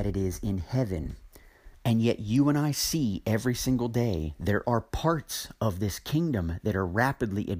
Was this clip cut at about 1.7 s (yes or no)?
yes